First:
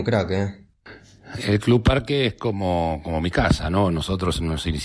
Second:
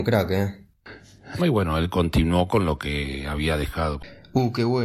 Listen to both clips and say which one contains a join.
second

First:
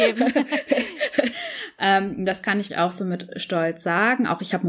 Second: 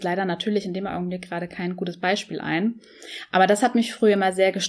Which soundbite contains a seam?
first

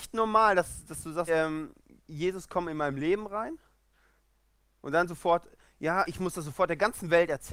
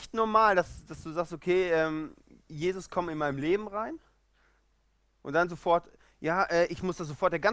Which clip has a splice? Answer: first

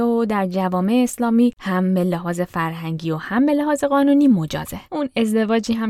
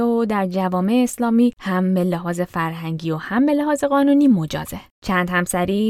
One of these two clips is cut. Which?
first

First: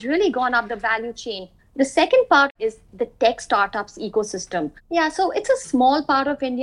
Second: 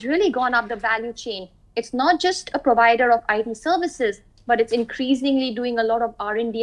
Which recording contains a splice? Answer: first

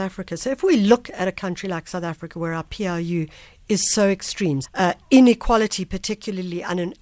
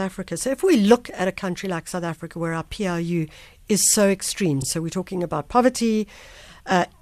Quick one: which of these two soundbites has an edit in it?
first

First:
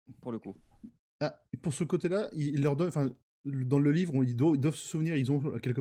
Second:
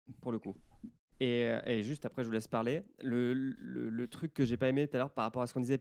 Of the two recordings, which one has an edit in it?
second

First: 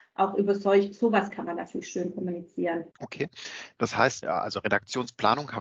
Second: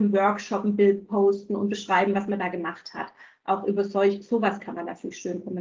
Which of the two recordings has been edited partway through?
first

